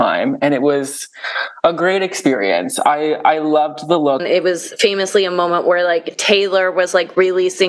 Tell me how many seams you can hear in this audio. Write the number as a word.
one